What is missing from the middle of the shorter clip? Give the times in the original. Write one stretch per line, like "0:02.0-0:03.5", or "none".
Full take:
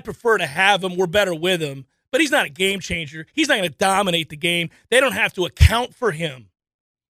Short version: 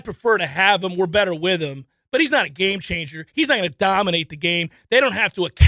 none

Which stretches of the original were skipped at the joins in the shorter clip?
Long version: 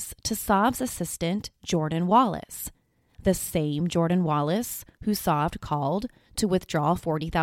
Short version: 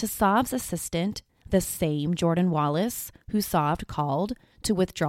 0:01.6-0:03.0

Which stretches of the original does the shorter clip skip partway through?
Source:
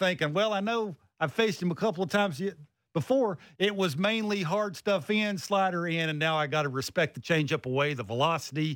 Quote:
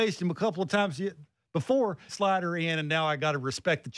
0:03.5-0:05.4

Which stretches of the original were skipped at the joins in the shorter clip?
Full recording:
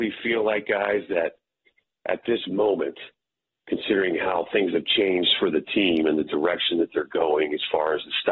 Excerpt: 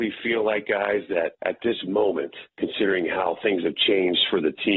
0:01.3-0:02.0
0:03.1-0:03.6

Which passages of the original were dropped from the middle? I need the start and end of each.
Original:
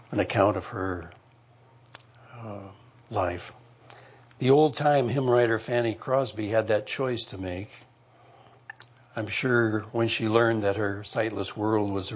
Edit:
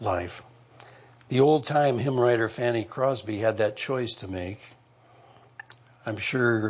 none

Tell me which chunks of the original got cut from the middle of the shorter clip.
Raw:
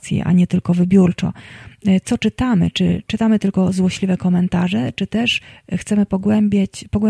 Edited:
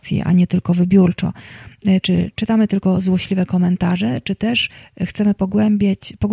0:02.0-0:02.7

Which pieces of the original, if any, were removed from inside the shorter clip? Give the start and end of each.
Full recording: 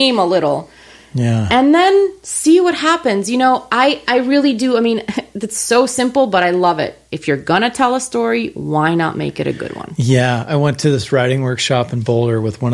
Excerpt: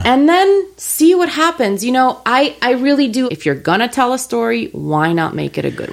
0:04.7-0:07.1

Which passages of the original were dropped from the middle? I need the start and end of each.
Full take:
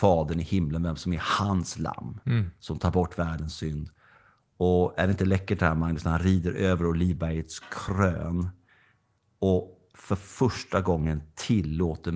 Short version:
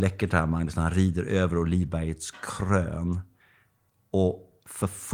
none

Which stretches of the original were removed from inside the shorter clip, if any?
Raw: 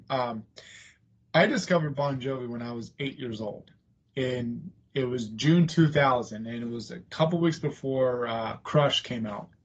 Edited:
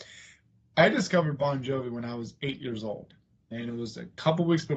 0:04.1-0:06.4

